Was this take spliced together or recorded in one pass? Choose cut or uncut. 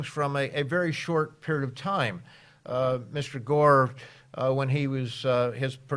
uncut